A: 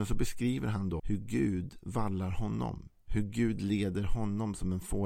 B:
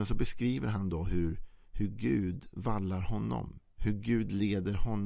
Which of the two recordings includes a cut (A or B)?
A